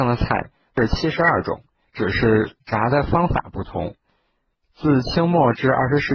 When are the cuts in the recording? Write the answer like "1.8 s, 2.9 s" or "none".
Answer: 1.8 s, 4.5 s